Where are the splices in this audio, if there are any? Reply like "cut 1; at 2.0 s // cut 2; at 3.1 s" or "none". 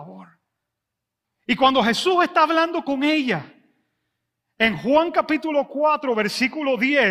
cut 1; at 1.2 s